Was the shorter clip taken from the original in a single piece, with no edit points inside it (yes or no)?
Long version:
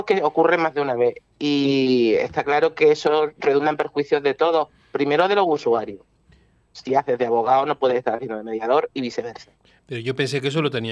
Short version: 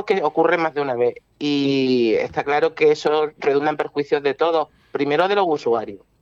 yes